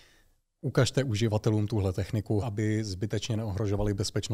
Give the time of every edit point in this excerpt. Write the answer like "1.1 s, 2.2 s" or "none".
2.4 s